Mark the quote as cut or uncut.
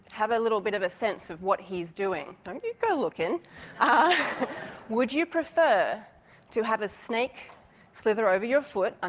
uncut